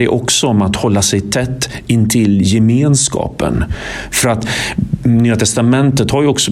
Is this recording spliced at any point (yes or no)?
no